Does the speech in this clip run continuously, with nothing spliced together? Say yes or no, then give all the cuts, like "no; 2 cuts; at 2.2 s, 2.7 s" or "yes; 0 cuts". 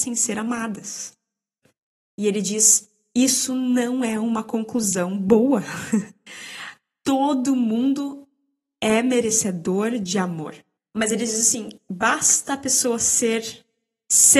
no; 1 cut; at 10.8 s